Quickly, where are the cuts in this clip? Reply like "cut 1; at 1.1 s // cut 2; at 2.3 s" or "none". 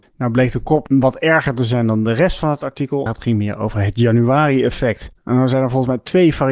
cut 1; at 3.1 s

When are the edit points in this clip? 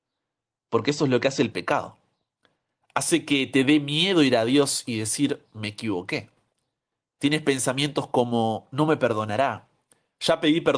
none

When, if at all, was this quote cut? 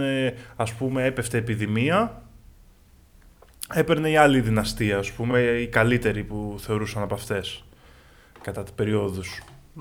none

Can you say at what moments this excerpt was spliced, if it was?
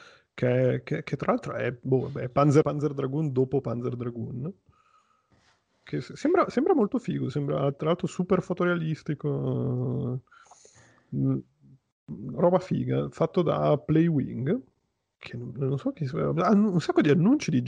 cut 1; at 2.6 s

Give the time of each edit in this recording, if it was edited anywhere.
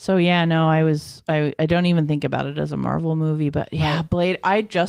none

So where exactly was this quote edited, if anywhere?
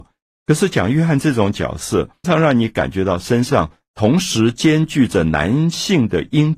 cut 1; at 2.2 s

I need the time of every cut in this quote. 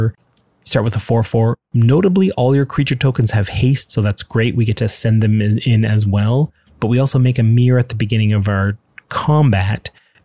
none

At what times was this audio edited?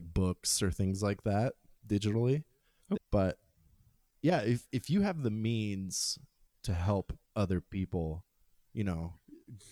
cut 1; at 3.0 s

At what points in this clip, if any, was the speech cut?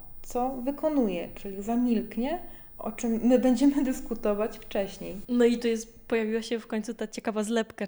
cut 1; at 2.8 s // cut 2; at 5.2 s

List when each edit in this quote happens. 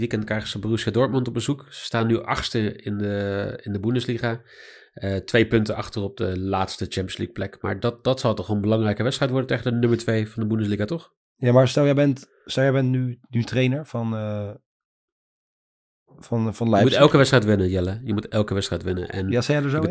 none

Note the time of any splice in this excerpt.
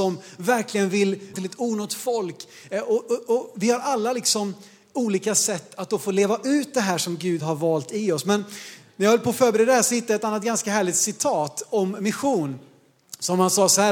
cut 1; at 1.3 s

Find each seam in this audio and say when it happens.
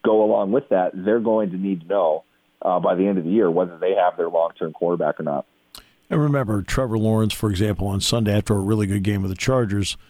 none

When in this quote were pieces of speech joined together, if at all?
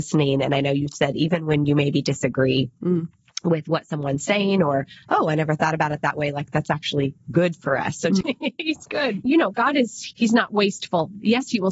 cut 1; at 8.2 s // cut 2; at 9.3 s

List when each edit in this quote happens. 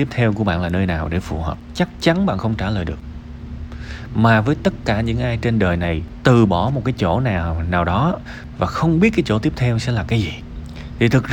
none

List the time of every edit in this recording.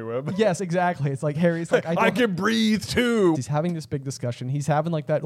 cut 1; at 3.3 s

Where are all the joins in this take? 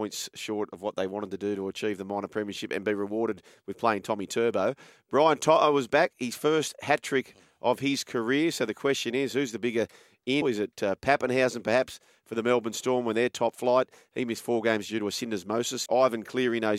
cut 1; at 10.4 s // cut 2; at 15.9 s

